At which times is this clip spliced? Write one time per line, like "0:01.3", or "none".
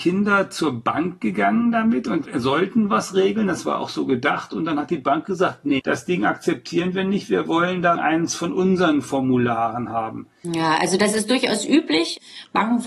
0:05.8
0:10.4